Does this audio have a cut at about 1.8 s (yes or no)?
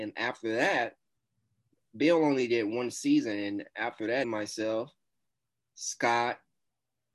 no